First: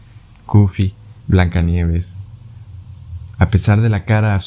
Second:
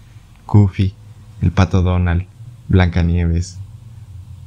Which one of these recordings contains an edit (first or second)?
first